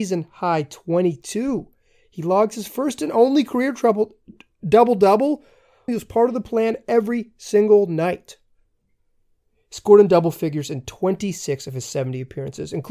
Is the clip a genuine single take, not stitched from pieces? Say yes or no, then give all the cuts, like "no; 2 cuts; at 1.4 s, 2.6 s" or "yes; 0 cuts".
no; 1 cut; at 5.9 s